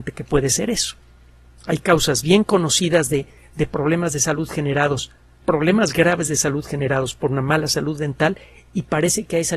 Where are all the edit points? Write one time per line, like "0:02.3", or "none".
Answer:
0:05.4